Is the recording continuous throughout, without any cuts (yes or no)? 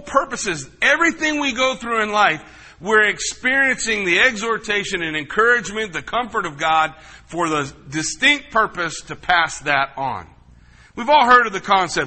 yes